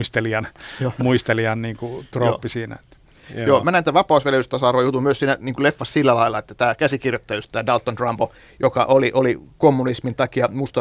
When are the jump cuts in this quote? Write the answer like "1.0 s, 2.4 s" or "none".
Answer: none